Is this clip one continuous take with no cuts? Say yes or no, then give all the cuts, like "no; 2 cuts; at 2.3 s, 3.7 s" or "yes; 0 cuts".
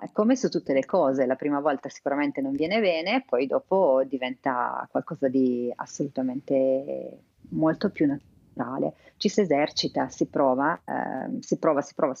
yes; 0 cuts